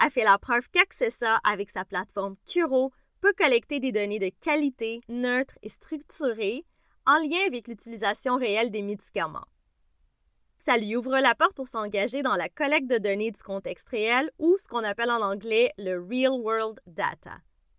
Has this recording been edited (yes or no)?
yes